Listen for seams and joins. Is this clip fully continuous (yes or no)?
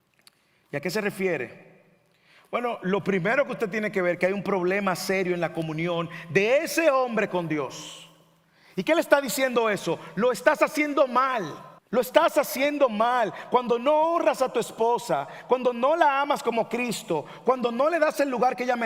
no